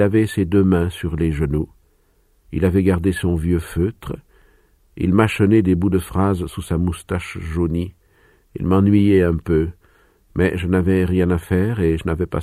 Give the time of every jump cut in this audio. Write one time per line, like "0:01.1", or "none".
none